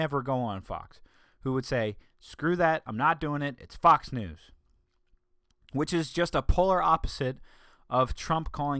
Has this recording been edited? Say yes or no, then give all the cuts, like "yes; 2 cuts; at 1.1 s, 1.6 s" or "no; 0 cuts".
no; 0 cuts